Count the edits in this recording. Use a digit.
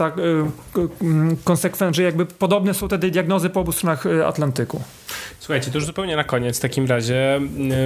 0